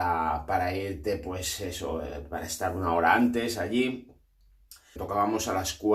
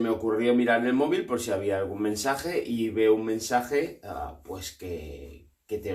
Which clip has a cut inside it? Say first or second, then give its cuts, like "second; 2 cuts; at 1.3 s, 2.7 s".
first; 1 cut; at 5.0 s